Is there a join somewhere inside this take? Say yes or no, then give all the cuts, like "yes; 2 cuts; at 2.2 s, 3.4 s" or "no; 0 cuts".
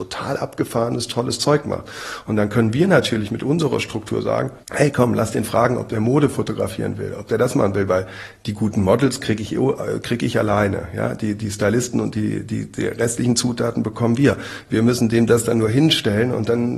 yes; 1 cut; at 4.6 s